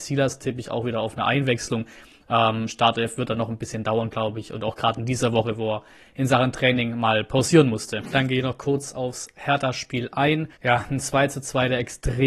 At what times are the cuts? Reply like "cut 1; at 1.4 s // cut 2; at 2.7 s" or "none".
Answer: cut 1; at 10.5 s